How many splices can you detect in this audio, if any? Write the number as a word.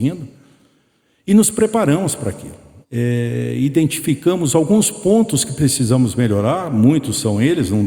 one